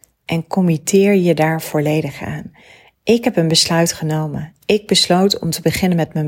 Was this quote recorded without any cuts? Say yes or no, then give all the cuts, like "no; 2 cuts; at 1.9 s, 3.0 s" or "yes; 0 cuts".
yes; 0 cuts